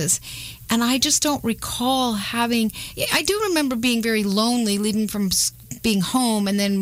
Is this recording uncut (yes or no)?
yes